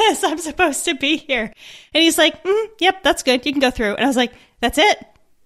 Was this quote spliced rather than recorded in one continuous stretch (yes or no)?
no